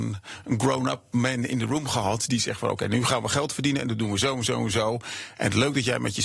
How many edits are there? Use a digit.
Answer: 0